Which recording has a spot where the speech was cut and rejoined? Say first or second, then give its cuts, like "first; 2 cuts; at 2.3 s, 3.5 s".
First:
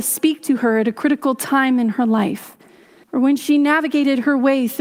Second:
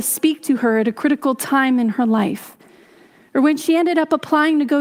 first; 1 cut; at 3.0 s